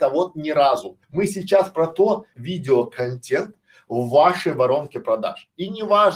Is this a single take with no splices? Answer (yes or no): no